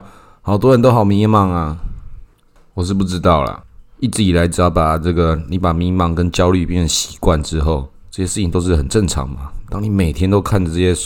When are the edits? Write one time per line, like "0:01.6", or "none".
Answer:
0:03.9